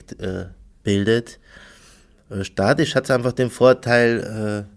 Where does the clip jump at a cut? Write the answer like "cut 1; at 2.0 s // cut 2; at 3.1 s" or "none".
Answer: none